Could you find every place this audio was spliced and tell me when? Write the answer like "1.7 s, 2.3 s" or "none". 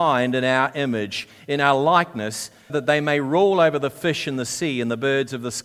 2.7 s